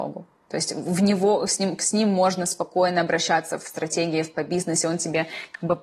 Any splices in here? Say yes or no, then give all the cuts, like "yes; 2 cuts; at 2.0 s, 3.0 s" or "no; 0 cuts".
no; 0 cuts